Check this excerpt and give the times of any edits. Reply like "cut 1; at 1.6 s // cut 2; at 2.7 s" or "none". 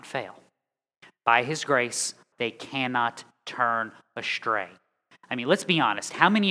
cut 1; at 2.3 s